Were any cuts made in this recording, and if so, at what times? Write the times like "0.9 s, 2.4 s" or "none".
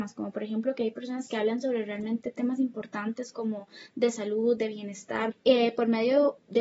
5.3 s